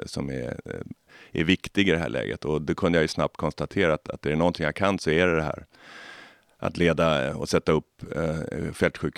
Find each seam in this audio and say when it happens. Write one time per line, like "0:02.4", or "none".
none